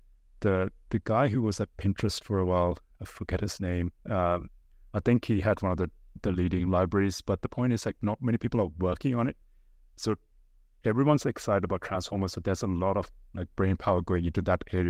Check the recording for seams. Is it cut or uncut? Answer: uncut